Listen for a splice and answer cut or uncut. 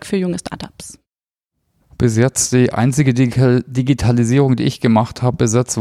cut